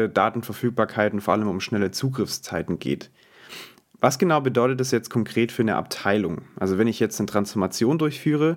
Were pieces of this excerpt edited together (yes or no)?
no